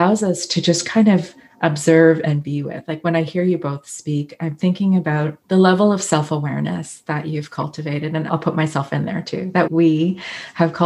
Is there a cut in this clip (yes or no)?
yes